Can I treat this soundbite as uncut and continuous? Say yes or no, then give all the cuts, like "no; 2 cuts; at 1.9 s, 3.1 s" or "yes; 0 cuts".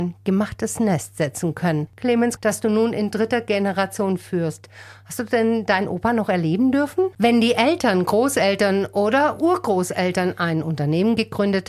no; 2 cuts; at 2.4 s, 7.1 s